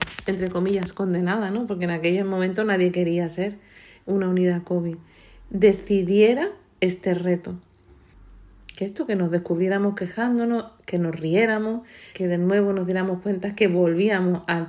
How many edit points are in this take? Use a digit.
2